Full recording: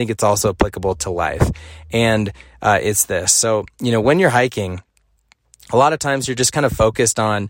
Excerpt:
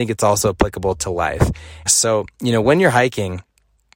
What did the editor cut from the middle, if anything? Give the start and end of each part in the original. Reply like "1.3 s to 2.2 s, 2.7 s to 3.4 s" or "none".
1.9 s to 3.2 s